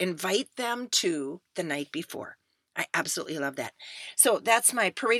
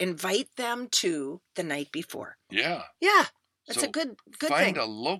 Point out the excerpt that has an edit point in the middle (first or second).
second